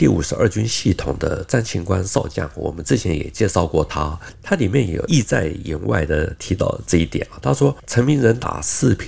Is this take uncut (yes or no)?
yes